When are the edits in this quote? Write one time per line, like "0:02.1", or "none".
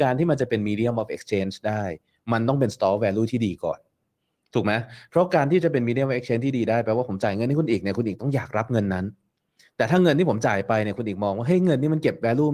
none